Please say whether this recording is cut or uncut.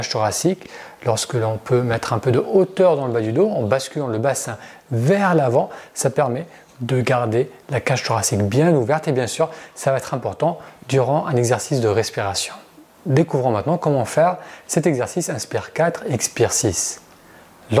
uncut